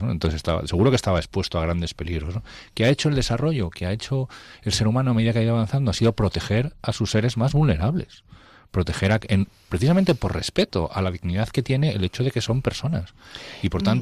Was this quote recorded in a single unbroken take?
yes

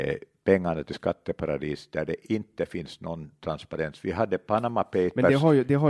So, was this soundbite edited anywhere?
no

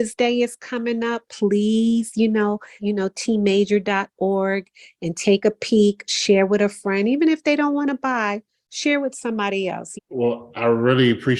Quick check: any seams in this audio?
yes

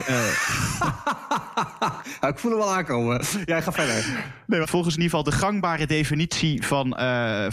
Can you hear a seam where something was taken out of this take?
yes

